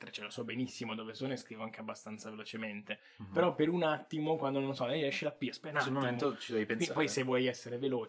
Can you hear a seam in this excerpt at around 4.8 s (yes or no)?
no